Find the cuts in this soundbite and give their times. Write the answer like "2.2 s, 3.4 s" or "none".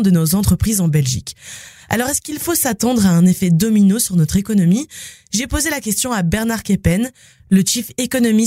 none